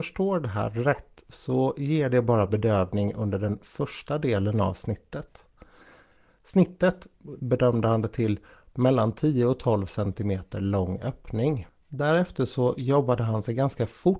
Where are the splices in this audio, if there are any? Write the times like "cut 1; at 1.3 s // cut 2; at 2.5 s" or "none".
cut 1; at 7.4 s